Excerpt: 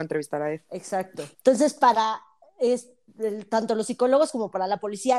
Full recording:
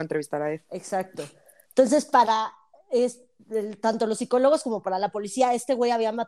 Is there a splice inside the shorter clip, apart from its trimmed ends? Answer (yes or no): yes